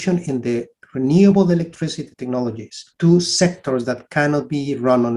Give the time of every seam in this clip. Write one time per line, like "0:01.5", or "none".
0:02.9